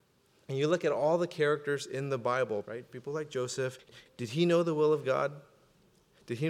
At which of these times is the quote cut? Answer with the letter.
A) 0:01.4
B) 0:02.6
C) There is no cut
B